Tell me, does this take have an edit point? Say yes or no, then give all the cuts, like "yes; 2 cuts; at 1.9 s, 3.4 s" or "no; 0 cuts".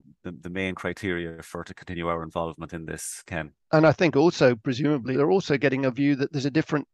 yes; 2 cuts; at 3.6 s, 5.1 s